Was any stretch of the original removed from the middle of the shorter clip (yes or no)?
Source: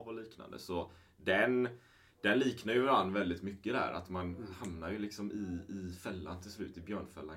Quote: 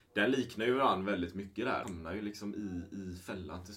yes